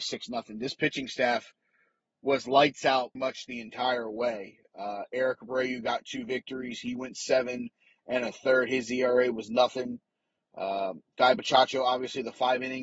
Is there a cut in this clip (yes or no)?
yes